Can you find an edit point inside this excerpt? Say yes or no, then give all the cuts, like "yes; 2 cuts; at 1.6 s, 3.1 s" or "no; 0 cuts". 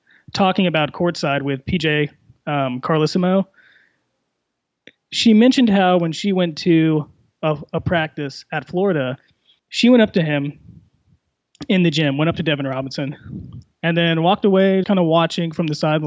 yes; 2 cuts; at 13.6 s, 14.8 s